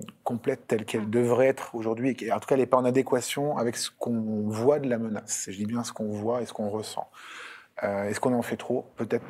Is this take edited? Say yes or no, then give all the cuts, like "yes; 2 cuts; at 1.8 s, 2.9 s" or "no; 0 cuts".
no; 0 cuts